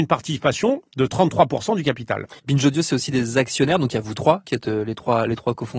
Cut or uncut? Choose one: cut